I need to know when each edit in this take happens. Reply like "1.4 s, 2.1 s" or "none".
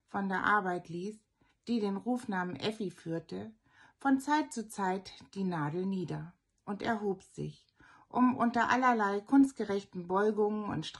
1.5 s